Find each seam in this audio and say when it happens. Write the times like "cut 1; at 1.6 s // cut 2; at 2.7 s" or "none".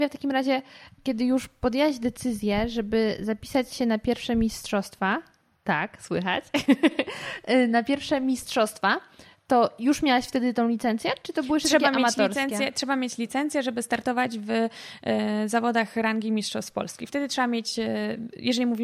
none